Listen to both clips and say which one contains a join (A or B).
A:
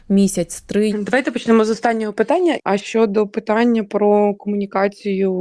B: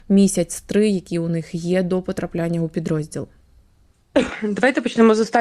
A